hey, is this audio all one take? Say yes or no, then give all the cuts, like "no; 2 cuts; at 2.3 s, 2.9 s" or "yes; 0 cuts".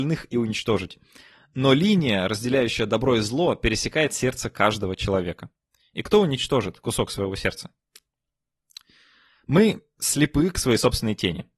yes; 0 cuts